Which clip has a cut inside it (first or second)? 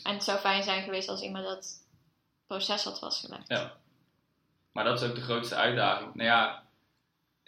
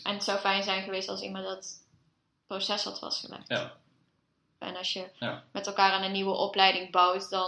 second